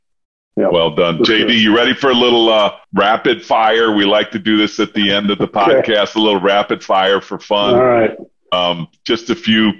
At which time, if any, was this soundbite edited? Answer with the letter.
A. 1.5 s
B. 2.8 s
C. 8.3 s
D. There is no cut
B